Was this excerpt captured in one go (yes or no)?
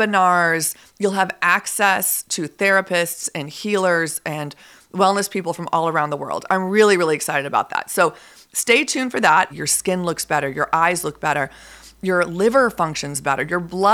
no